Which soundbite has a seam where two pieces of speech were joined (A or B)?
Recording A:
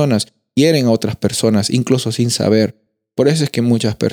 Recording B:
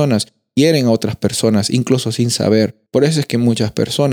B